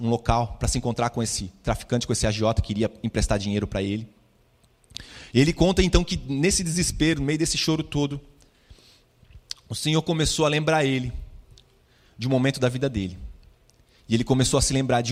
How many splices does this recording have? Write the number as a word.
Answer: one